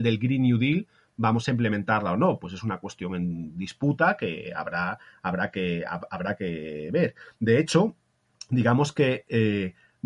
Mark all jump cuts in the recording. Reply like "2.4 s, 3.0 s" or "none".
none